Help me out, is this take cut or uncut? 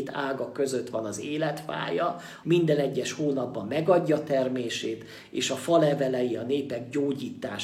cut